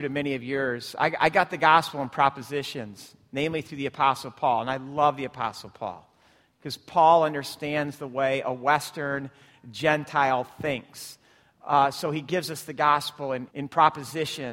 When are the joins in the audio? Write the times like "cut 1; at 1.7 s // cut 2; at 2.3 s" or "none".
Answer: cut 1; at 13.5 s